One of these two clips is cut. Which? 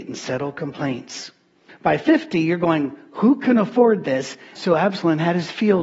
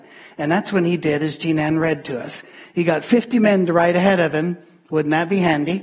first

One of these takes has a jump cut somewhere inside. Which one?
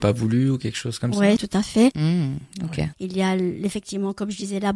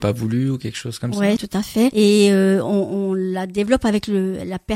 first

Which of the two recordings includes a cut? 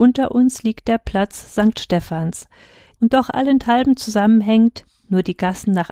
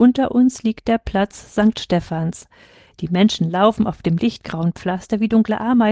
first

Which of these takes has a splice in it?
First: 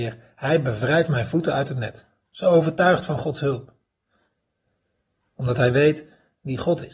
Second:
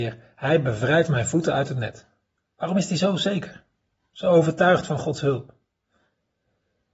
first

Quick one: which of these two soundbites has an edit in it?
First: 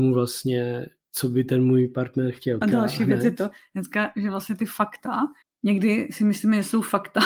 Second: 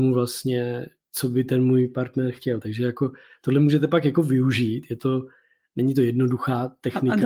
first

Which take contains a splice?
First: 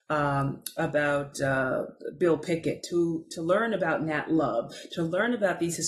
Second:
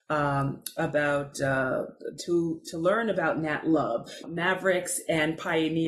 second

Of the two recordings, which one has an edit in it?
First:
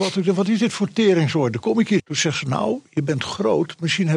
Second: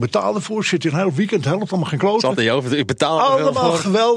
first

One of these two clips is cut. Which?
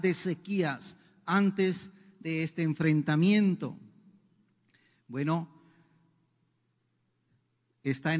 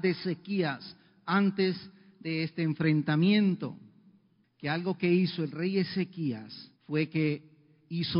second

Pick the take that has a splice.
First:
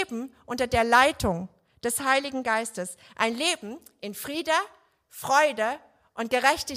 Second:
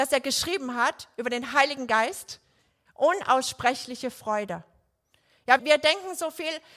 second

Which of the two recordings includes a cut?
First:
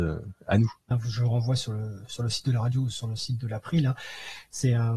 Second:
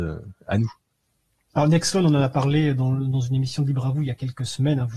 first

